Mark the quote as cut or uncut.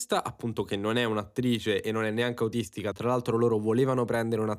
uncut